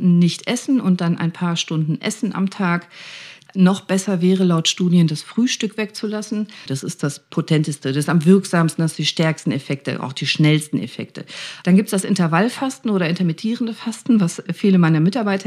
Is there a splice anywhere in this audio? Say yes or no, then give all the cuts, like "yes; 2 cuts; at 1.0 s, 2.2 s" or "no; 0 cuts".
yes; 3 cuts; at 3.5 s, 6.7 s, 11.6 s